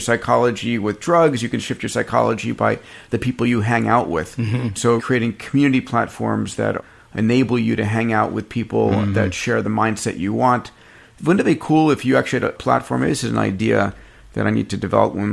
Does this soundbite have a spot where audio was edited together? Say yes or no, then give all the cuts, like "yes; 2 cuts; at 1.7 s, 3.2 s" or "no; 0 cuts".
yes; 1 cut; at 5.0 s